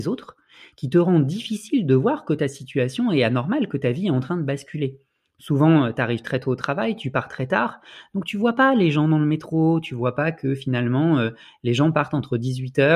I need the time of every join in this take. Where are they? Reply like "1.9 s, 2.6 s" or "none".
none